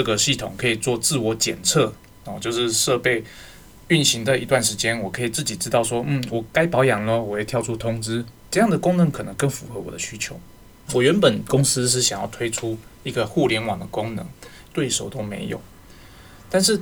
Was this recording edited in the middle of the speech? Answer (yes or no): yes